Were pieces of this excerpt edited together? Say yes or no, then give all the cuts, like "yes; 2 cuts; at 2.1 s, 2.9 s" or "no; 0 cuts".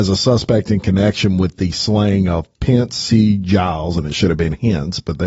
no; 0 cuts